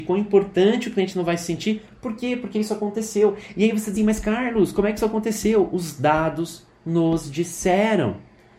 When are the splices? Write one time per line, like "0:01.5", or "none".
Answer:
0:04.0

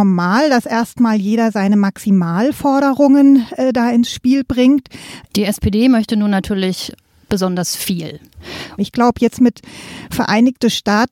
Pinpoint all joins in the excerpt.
0:05.3
0:08.8

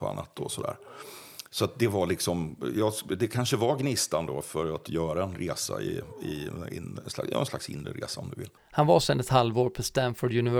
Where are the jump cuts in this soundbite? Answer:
0:08.6

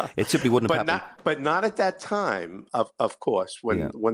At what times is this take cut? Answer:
0:01.2
0:02.7

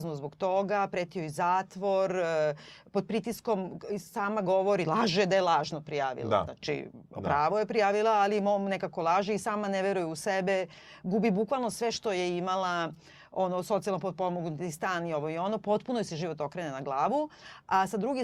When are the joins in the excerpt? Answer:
none

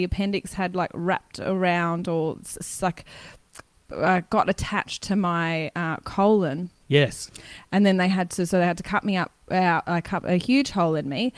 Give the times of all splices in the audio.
none

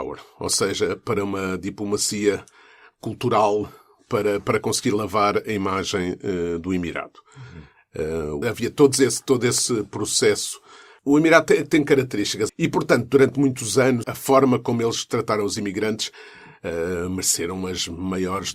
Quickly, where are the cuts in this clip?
0:08.4
0:12.5
0:14.0

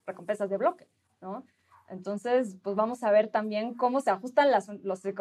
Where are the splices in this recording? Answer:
none

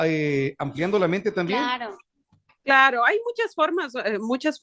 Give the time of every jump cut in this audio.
none

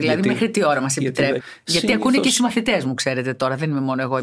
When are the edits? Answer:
0:01.4

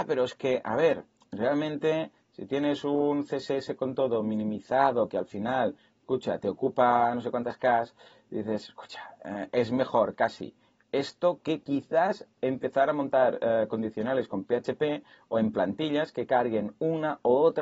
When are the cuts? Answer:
none

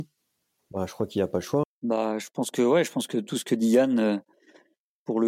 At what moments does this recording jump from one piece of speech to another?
0:01.6

